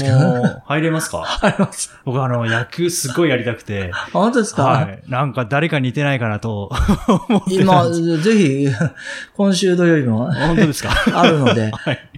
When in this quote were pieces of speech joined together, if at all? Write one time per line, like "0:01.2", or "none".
none